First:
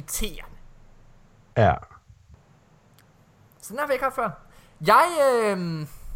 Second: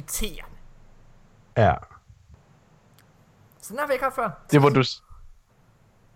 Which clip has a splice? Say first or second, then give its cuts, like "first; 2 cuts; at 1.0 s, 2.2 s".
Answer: second; 1 cut; at 4.5 s